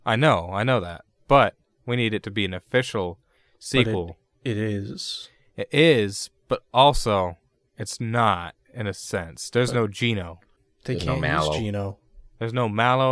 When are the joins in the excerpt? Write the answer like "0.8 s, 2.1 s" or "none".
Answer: none